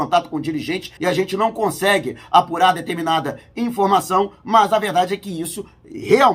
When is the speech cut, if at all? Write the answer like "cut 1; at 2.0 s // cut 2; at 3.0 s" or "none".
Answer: cut 1; at 1.0 s